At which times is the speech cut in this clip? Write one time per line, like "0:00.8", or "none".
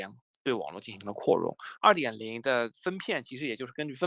0:01.8